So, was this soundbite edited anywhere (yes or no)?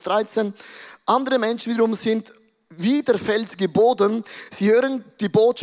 no